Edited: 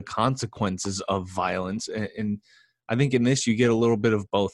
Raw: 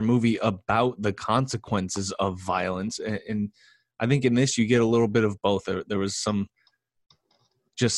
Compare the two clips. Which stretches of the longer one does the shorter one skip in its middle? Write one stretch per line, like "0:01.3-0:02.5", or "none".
none